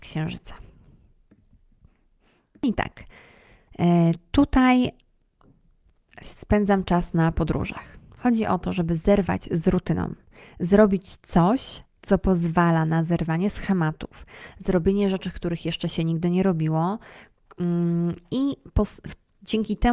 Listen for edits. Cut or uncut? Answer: cut